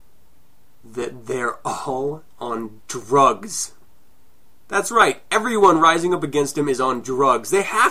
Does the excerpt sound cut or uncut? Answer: uncut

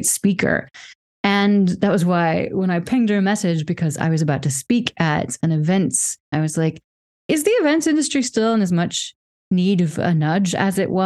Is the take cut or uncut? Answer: cut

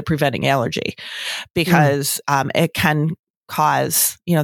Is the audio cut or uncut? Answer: uncut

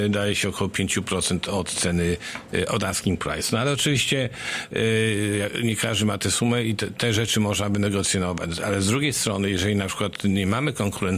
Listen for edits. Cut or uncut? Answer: uncut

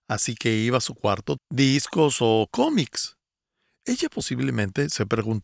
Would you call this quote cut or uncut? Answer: cut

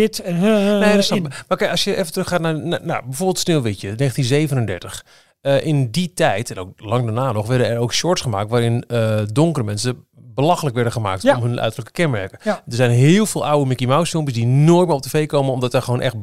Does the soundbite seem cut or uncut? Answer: uncut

